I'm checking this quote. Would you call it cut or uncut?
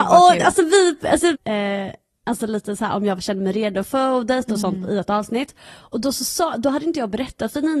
cut